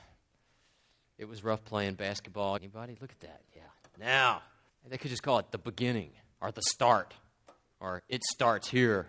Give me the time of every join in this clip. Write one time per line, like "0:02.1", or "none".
0:02.6
0:04.7